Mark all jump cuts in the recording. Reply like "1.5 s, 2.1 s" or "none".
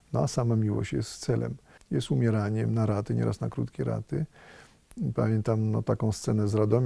1.8 s